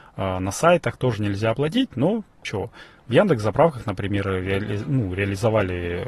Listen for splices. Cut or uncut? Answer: uncut